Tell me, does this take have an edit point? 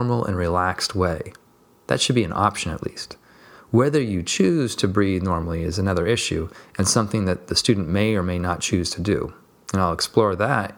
no; 0 cuts

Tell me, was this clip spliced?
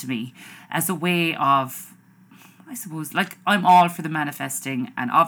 no; 0 cuts

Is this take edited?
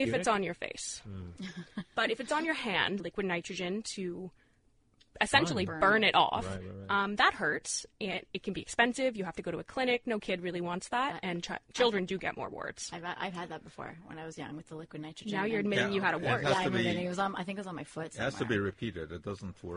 yes; 1 cut; at 3.0 s

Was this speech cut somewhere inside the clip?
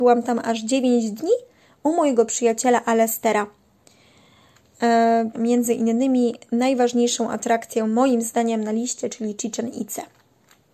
yes; 1 cut; at 5.3 s

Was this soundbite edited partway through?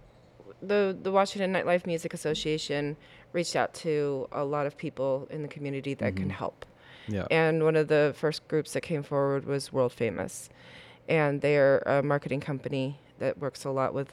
no; 0 cuts

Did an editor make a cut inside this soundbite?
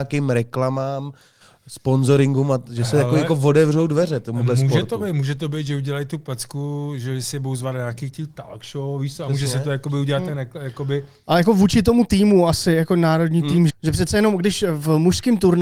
yes; 1 cut; at 13.7 s

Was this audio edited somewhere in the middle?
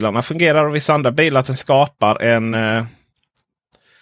no; 0 cuts

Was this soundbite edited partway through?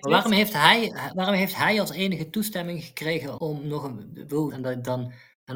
yes; 2 cuts; at 3.4 s, 4.5 s

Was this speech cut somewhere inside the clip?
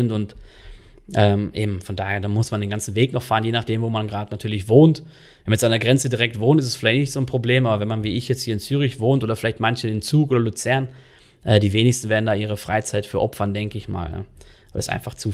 no; 0 cuts

